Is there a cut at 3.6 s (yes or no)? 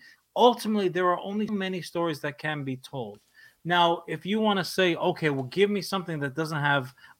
no